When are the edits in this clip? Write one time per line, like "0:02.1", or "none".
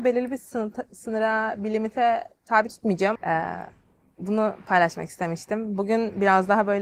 0:03.2